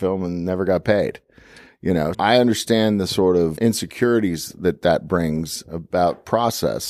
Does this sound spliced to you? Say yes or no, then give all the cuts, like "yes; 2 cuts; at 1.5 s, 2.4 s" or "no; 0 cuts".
yes; 2 cuts; at 2.1 s, 3.6 s